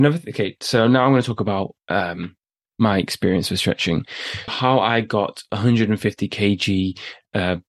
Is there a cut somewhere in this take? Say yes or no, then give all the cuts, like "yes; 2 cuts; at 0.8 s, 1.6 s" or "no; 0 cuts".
yes; 1 cut; at 4.5 s